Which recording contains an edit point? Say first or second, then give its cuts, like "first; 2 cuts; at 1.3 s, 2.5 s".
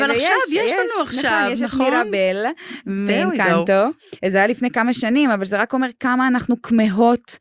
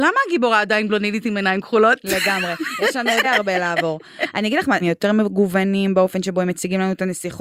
second; 2 cuts; at 3.2 s, 4.8 s